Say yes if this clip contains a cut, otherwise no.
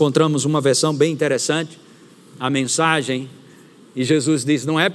no